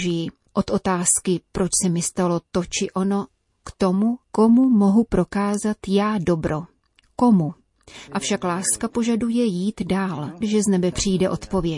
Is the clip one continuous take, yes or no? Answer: no